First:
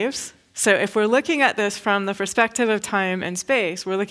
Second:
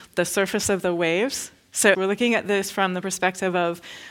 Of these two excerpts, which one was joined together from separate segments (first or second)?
second